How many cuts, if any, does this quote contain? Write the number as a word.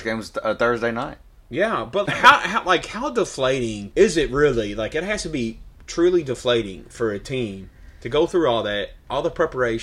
one